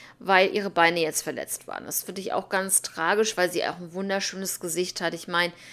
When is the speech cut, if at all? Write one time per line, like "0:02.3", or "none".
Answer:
none